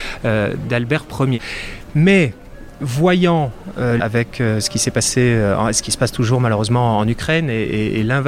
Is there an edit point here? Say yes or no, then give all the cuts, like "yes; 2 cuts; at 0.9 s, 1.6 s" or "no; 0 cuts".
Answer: yes; 1 cut; at 4.0 s